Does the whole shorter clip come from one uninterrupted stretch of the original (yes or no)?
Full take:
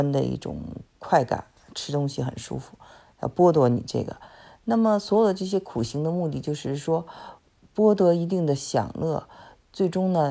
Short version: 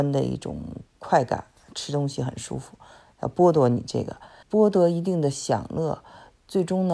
no